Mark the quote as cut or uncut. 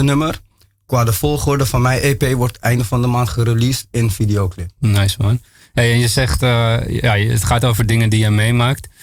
uncut